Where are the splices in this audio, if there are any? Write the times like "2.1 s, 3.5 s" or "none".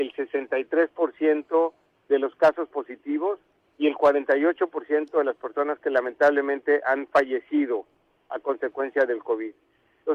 none